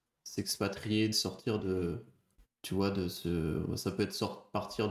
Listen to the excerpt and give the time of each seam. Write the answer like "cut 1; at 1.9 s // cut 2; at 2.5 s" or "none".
cut 1; at 1.1 s